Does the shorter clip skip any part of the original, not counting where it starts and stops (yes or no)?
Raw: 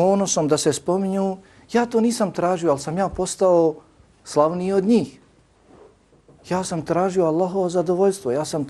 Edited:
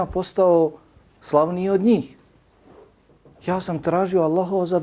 no